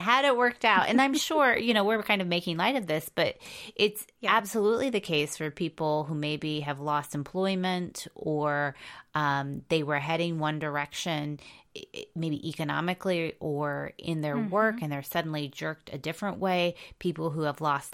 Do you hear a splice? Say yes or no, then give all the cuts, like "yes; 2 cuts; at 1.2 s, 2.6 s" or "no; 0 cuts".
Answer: no; 0 cuts